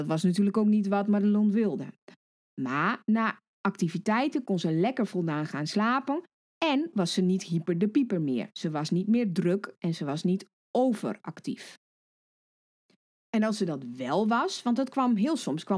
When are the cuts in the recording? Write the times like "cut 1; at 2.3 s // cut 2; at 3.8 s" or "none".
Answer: none